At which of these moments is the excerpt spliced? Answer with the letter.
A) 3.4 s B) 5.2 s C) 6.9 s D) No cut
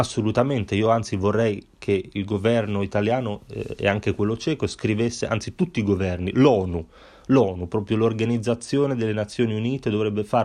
D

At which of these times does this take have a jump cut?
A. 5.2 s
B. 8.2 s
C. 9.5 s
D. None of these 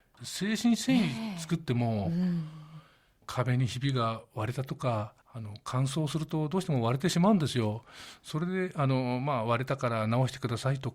A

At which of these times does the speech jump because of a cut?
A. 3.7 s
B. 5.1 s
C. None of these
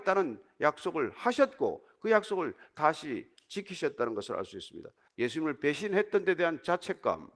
B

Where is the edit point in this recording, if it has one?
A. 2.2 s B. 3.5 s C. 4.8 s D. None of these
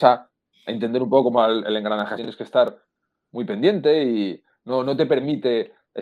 A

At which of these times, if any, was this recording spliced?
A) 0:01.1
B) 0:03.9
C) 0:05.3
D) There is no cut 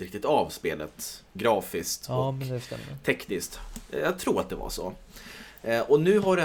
D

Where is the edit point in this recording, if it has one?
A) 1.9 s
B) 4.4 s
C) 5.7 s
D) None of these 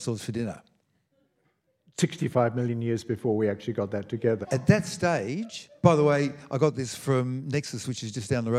B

